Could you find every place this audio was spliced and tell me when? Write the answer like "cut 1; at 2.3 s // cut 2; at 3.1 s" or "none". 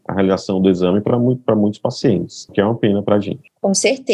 none

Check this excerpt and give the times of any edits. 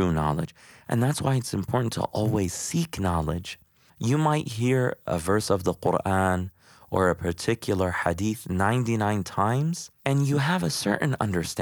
cut 1; at 10.0 s

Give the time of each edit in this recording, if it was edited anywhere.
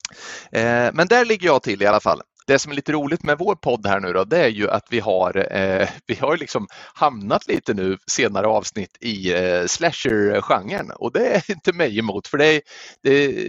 cut 1; at 2.4 s

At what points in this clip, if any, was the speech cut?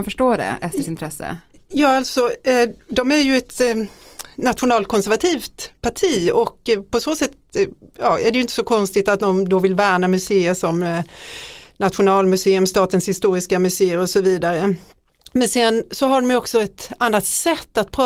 none

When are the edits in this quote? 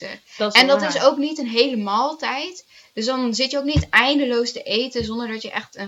none

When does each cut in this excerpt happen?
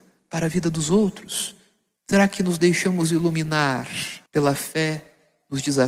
cut 1; at 2.0 s // cut 2; at 4.3 s

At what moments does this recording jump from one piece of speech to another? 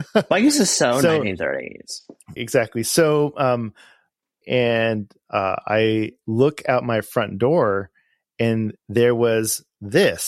cut 1; at 2.4 s // cut 2; at 4.4 s

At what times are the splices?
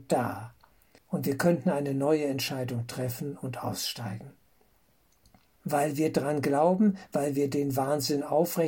cut 1; at 1.0 s // cut 2; at 5.6 s // cut 3; at 7.1 s

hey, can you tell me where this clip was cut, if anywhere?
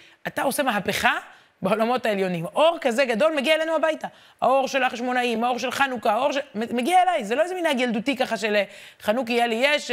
none

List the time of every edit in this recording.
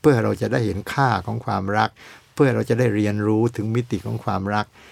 none

